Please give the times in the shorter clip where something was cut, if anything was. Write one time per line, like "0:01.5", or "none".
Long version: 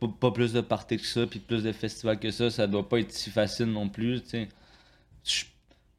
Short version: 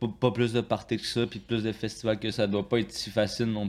0:02.3

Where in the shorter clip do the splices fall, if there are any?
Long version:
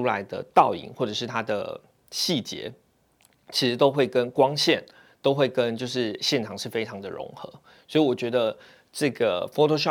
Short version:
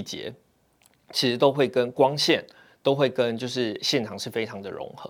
none

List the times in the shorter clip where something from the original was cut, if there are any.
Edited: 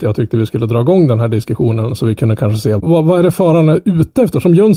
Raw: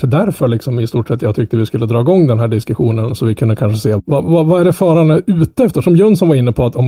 0:02.8

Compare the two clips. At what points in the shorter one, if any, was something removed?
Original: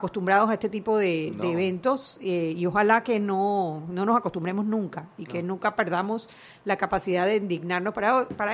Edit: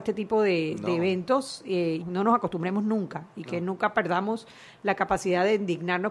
0:02.0

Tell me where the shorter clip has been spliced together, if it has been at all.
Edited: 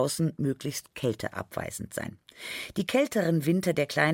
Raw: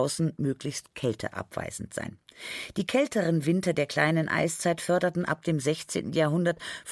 none

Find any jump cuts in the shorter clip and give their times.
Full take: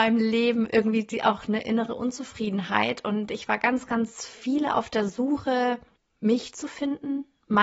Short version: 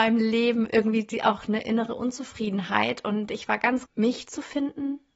0:03.9

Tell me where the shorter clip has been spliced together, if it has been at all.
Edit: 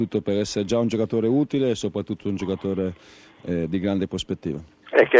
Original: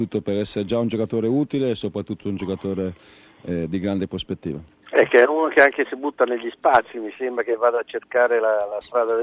none

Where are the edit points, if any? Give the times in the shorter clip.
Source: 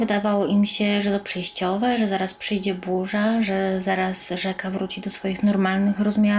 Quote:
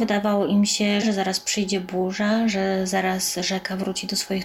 0:01.0

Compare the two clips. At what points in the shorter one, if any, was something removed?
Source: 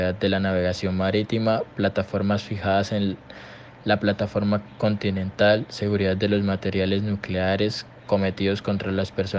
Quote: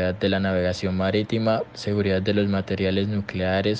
0:01.7

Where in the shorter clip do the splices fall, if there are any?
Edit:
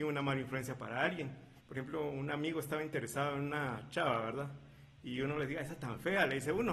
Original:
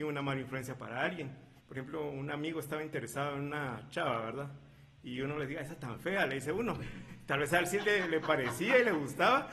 none

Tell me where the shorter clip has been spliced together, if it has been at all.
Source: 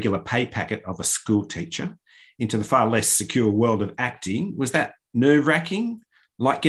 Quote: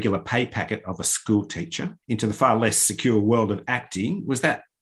0:02.0

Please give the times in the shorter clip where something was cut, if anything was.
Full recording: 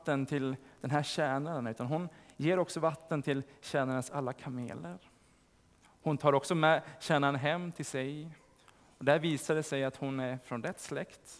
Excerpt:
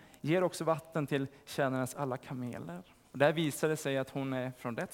0:03.0

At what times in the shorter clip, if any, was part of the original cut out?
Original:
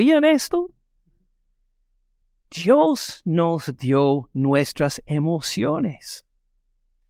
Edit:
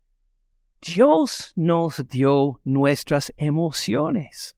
none

